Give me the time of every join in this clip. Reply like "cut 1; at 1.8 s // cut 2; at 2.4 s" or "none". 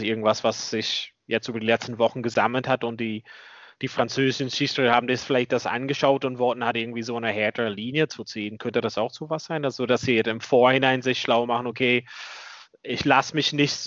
none